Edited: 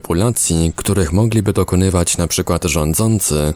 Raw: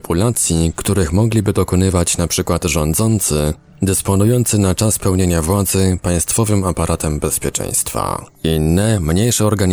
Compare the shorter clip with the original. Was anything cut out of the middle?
no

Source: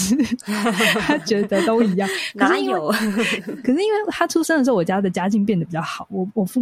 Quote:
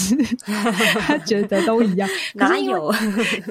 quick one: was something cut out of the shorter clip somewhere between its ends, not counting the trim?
no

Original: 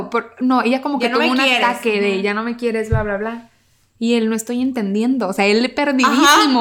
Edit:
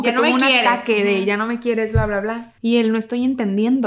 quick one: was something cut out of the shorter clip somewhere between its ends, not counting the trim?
yes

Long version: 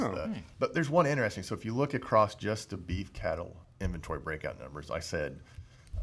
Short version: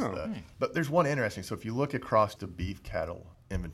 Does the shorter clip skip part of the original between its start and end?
yes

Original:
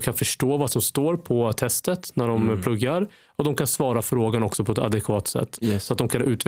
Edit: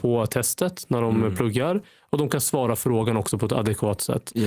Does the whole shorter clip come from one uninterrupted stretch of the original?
yes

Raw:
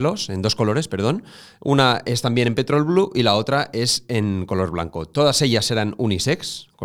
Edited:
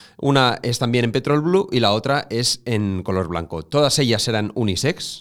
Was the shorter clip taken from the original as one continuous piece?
yes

